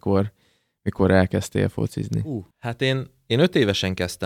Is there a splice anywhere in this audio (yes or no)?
yes